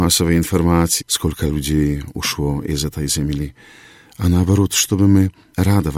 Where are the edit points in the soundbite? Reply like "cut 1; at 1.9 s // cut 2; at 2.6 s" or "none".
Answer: cut 1; at 1.0 s